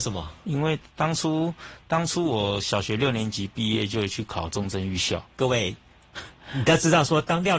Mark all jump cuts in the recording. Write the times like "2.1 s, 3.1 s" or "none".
5.2 s